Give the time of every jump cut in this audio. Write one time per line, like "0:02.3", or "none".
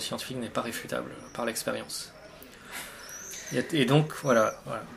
none